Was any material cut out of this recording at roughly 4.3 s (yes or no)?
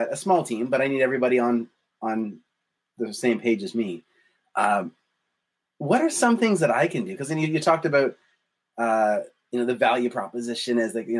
no